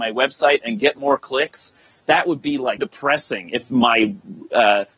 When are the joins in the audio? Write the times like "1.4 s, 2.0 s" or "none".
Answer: 2.8 s